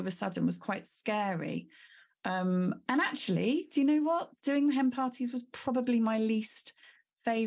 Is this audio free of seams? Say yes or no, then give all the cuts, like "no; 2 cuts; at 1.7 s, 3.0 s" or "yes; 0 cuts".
no; 1 cut; at 2.9 s